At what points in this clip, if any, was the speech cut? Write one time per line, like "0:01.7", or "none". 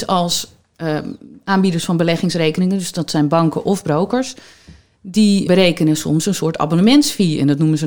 0:05.5